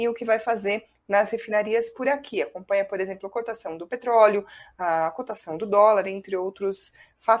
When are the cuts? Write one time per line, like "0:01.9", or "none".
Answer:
none

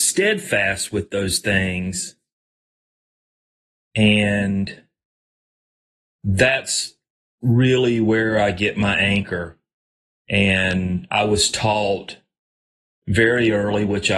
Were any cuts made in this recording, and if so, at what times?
none

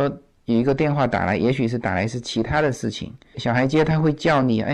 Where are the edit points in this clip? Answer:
0:03.3

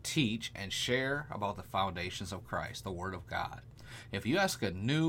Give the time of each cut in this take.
none

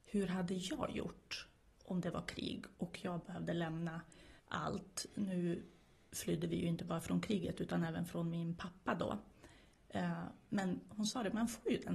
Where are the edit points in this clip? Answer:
0:04.4

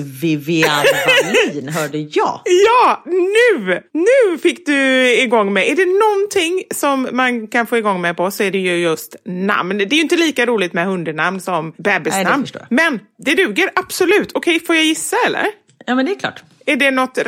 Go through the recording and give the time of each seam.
none

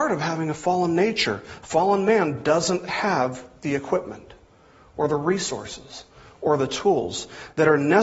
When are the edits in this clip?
none

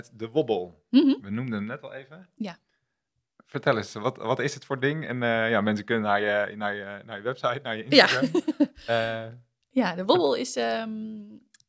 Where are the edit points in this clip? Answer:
none

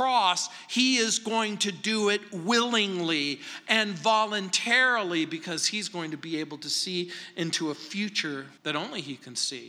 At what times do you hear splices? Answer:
0:08.6

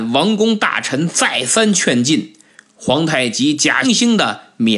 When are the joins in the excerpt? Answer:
0:03.8

